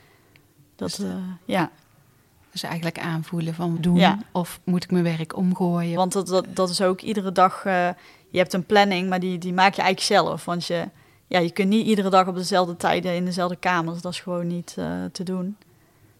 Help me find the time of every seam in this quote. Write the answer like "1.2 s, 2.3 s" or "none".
3.8 s, 6.0 s